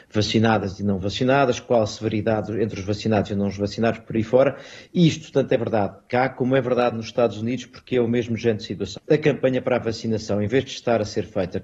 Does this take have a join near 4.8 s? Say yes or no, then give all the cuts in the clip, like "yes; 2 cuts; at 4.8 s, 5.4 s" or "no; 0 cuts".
no; 1 cut; at 9.0 s